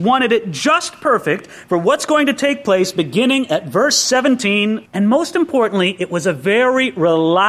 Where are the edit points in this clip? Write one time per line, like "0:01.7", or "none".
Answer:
0:04.9